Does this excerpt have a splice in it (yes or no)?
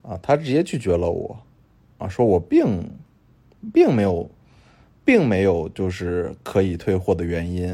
no